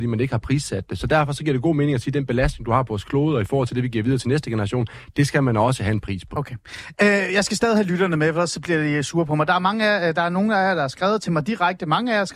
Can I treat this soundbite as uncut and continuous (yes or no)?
yes